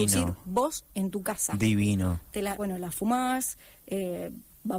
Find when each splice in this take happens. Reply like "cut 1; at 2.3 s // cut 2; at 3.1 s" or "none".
cut 1; at 2.6 s